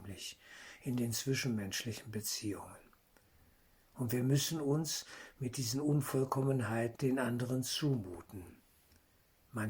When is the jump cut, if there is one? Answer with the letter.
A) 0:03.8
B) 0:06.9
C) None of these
B